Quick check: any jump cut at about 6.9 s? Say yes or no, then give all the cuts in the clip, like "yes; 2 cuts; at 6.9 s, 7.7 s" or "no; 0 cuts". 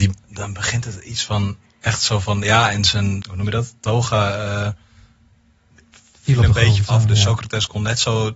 yes; 2 cuts; at 3.2 s, 6.9 s